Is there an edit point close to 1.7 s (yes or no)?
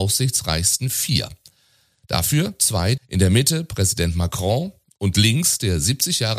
no